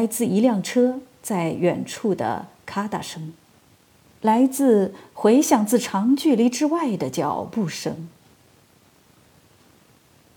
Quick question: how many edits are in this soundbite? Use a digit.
0